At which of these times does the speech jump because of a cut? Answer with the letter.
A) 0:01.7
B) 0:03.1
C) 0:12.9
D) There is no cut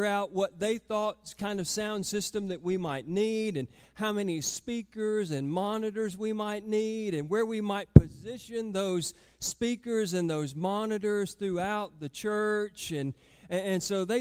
D